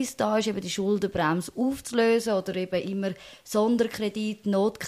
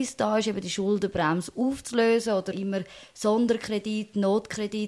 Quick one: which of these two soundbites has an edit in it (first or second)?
second